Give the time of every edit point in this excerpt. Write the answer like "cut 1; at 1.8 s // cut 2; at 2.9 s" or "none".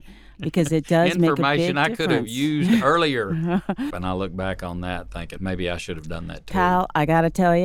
cut 1; at 3.9 s // cut 2; at 5.4 s